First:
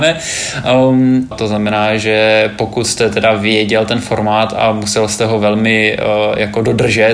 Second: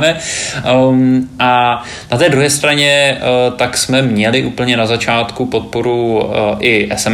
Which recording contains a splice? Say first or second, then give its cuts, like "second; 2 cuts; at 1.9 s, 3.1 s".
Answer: first; 1 cut; at 1.3 s